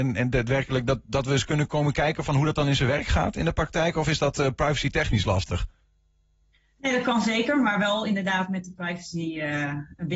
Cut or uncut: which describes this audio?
uncut